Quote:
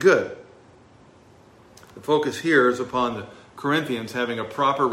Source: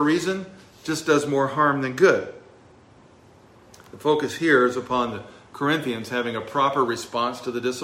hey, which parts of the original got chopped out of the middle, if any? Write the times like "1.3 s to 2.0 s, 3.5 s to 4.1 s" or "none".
none